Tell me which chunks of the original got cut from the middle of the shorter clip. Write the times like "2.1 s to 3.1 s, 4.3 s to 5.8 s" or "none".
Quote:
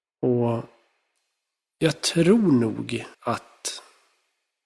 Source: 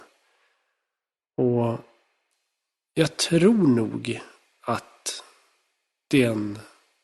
4.3 s to 4.6 s